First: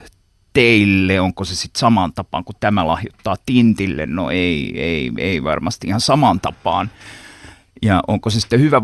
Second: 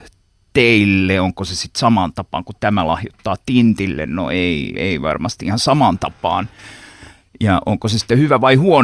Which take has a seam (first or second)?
second